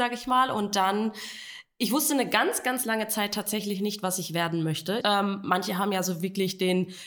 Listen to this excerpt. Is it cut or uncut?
cut